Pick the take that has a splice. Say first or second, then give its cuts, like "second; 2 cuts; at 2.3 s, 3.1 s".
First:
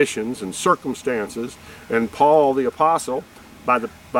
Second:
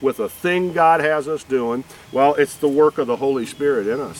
second; 1 cut; at 2.0 s